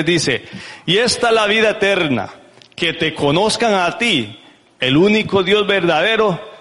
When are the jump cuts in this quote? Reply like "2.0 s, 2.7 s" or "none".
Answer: none